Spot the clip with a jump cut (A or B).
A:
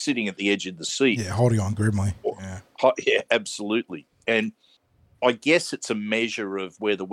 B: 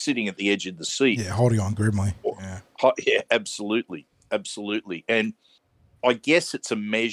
A